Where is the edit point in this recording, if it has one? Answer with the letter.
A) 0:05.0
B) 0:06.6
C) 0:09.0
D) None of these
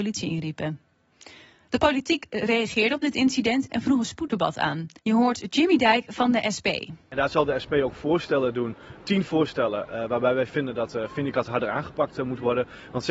A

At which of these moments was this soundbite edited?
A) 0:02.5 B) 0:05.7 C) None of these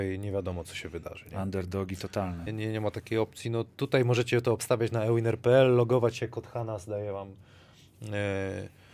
A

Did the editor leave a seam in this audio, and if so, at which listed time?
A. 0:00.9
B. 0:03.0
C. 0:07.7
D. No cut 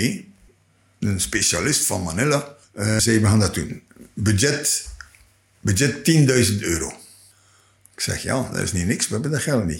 B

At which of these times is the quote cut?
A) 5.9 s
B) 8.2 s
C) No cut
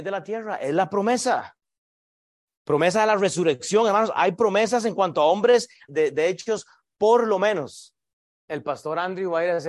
A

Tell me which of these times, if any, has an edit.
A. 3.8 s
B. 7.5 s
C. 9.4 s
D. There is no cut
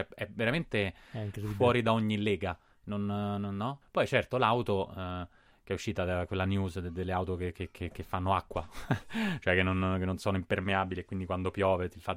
A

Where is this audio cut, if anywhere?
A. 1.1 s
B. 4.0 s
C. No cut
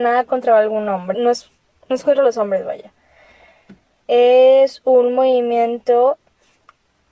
A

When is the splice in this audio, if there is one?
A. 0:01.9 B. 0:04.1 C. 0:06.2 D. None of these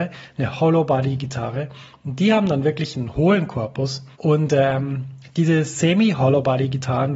B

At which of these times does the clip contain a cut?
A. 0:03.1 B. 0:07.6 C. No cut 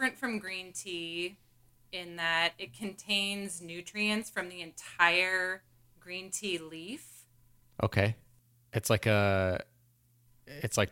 B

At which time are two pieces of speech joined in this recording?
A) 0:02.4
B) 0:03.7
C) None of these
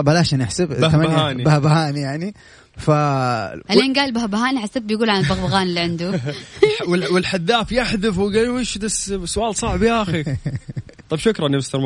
B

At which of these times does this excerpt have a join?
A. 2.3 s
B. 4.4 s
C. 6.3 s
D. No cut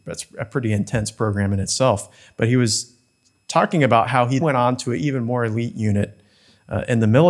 B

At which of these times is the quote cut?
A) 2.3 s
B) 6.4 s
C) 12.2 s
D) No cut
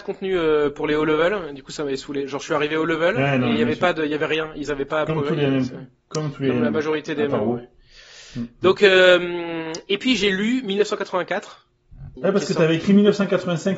C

